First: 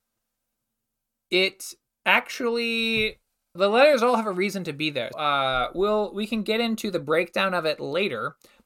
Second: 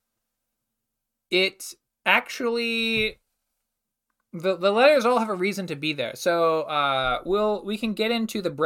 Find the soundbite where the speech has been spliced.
first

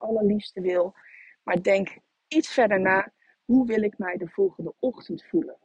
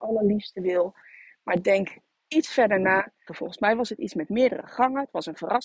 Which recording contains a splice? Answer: second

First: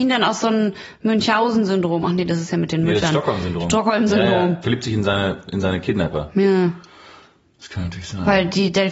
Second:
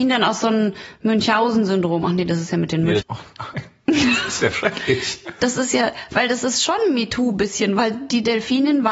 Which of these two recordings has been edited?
second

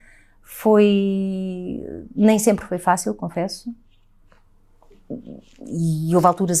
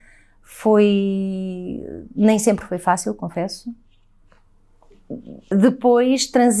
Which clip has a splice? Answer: second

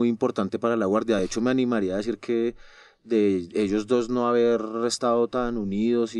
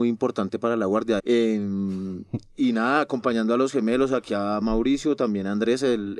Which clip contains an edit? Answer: second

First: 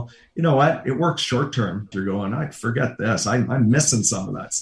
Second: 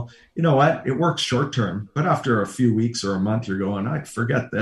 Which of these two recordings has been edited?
first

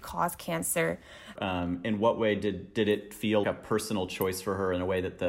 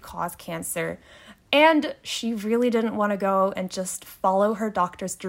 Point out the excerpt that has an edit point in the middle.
first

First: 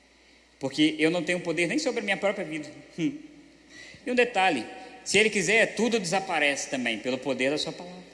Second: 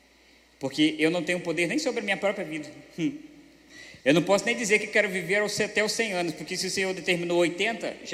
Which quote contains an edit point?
first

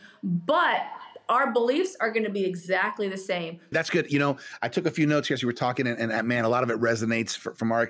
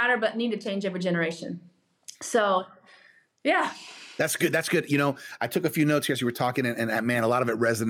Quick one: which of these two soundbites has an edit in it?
first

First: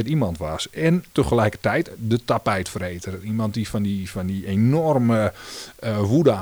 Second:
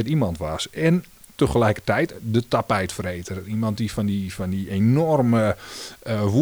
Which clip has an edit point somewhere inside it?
first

